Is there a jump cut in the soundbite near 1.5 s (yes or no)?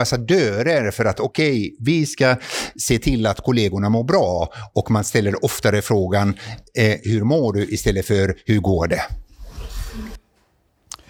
no